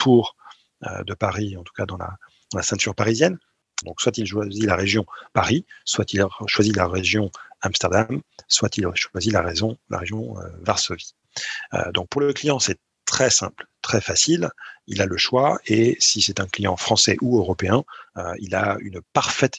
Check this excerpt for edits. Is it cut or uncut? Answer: cut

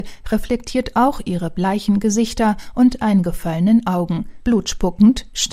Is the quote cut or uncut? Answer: cut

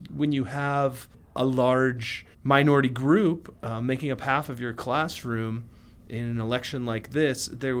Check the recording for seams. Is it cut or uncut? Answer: cut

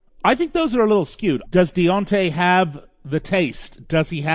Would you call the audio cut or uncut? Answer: cut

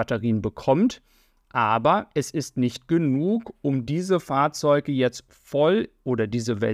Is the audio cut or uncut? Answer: uncut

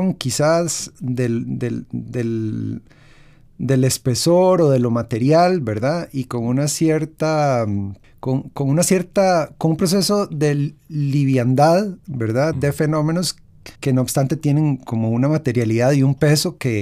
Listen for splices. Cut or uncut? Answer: cut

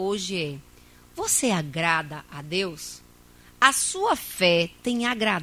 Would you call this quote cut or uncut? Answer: uncut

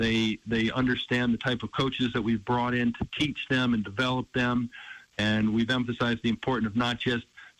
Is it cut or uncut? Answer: uncut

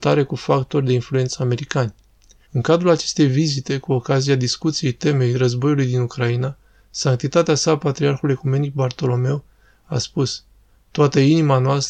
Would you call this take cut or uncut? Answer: cut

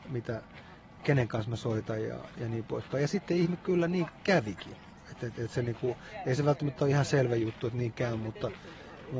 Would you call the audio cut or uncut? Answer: uncut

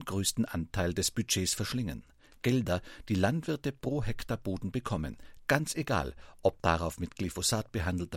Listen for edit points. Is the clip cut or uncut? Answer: uncut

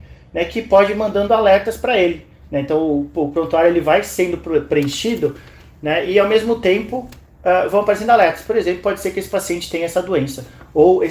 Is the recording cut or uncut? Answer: uncut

